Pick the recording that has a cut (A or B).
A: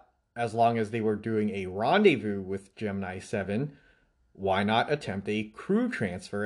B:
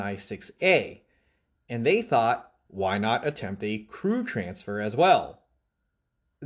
B